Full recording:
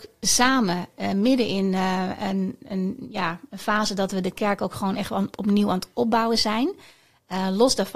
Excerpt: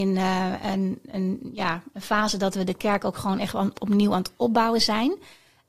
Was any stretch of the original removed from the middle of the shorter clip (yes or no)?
no